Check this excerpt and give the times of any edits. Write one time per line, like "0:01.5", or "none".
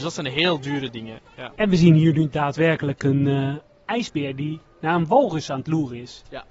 none